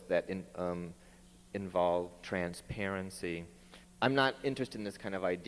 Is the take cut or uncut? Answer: cut